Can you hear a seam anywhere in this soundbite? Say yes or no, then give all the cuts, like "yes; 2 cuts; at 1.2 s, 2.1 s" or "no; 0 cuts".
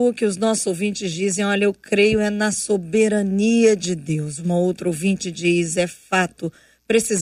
no; 0 cuts